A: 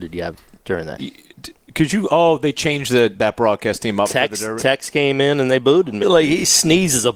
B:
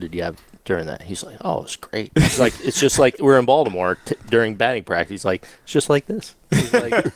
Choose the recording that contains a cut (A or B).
A